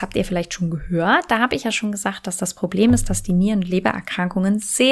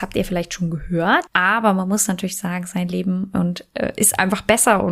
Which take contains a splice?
second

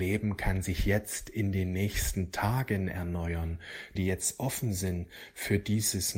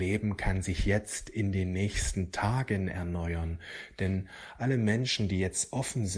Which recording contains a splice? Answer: first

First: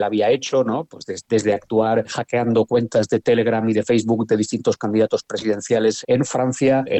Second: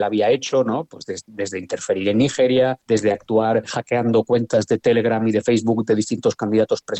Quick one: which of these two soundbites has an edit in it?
first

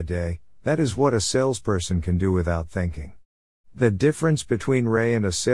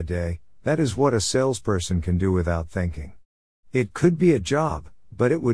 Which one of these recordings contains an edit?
first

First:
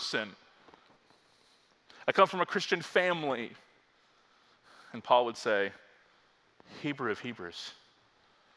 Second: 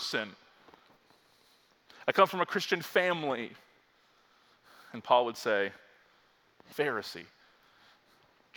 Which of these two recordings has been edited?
second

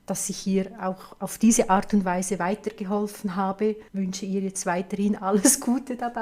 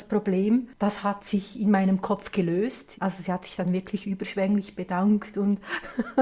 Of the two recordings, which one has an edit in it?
second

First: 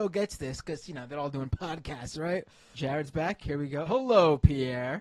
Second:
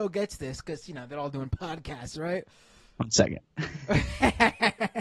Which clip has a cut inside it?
first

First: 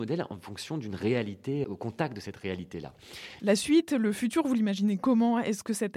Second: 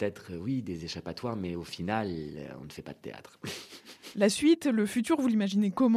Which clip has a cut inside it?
first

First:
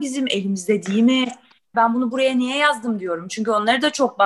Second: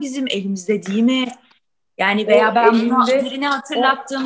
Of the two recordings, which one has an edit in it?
first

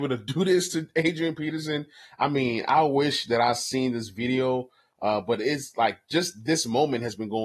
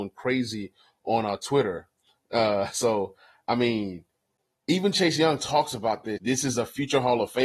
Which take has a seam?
second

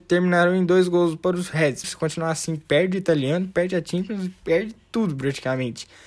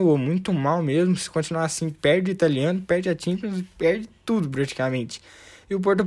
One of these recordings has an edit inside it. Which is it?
first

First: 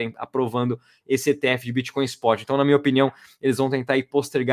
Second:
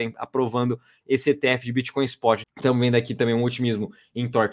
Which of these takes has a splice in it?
second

